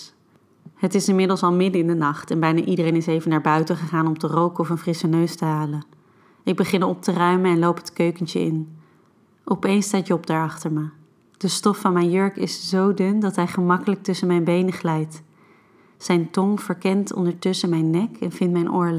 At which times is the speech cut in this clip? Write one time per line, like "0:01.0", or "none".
0:11.3